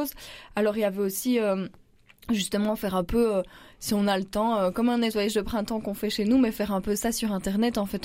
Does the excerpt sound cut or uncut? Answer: uncut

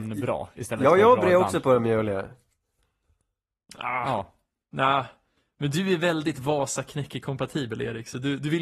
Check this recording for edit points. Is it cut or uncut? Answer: uncut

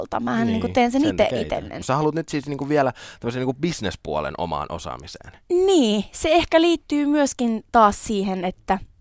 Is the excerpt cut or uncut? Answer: cut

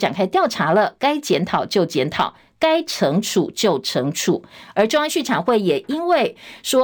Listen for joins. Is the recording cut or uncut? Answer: uncut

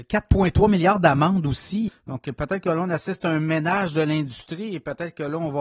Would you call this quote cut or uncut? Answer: cut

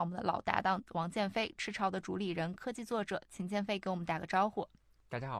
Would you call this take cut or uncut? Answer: uncut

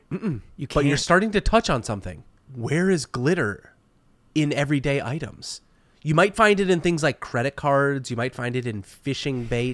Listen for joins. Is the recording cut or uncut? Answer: uncut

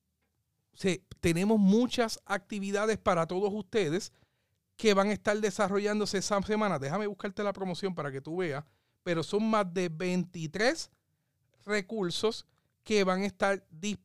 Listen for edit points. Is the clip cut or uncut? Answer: uncut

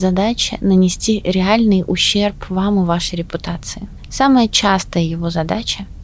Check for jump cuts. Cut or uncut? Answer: uncut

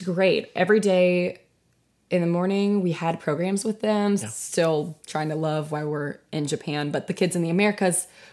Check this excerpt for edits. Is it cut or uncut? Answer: cut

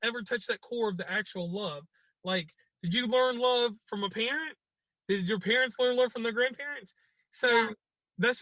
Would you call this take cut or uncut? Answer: uncut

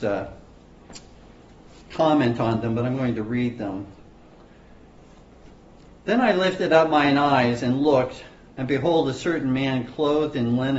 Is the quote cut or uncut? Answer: uncut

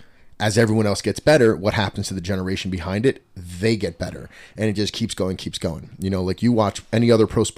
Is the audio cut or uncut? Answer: uncut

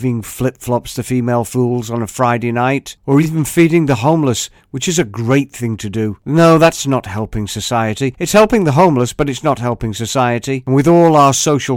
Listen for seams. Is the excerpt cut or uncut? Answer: uncut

